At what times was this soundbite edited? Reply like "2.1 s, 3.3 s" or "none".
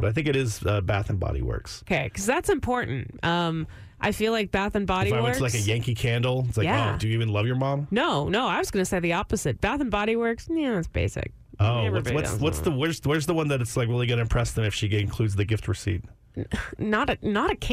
none